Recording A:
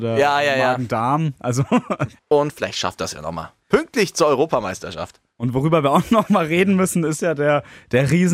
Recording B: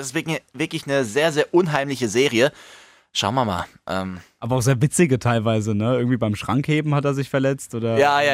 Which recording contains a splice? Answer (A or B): A